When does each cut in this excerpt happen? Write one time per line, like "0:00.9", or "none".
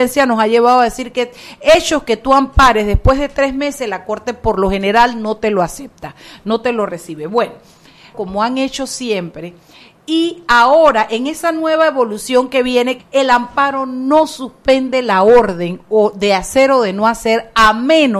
0:08.1
0:13.0

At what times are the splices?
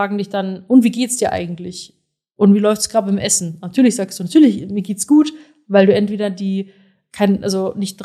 none

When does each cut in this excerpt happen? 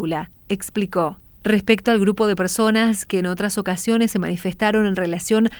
0:01.3

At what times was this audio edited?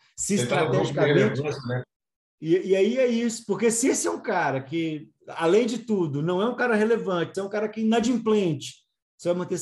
0:01.8
0:07.3

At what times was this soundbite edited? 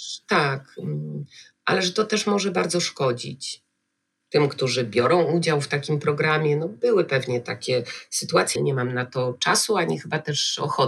0:04.2
0:08.6

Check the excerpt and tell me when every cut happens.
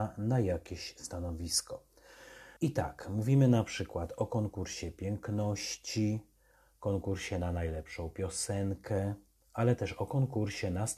0:02.6

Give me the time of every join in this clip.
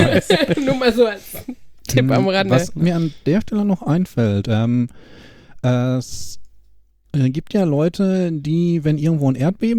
none

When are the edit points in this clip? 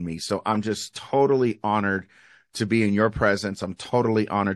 none

